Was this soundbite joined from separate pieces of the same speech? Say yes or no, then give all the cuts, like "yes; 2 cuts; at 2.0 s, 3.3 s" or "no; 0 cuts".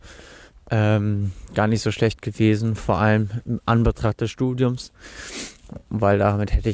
no; 0 cuts